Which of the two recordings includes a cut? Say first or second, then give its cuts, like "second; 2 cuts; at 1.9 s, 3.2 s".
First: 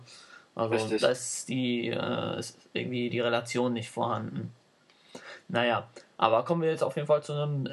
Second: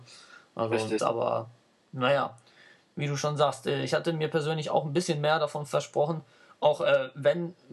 second; 1 cut; at 1.0 s